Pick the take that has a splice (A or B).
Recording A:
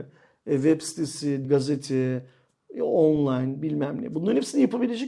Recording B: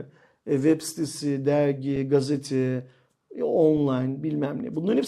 A